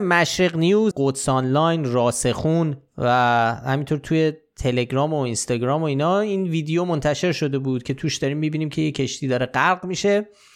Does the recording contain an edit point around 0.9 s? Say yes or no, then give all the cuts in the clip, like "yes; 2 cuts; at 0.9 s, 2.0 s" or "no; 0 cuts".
yes; 1 cut; at 0.9 s